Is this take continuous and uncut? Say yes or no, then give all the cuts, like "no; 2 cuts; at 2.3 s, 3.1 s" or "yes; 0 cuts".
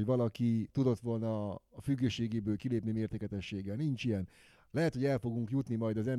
yes; 0 cuts